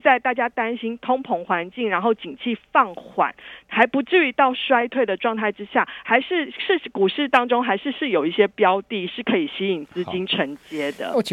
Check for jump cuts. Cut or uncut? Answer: uncut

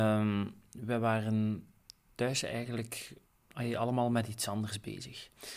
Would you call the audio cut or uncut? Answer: uncut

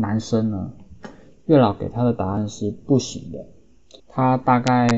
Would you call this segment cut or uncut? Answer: cut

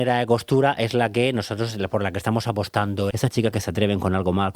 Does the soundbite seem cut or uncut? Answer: cut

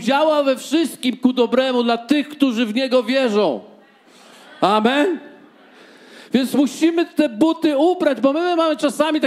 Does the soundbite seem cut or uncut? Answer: uncut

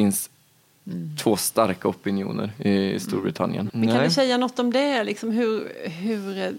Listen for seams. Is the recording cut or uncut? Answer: cut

